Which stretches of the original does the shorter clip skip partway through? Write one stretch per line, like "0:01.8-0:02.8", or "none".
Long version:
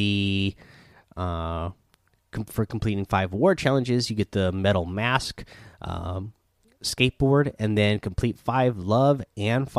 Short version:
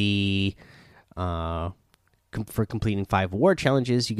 none